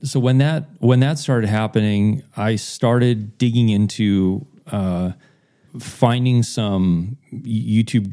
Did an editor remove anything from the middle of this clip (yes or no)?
yes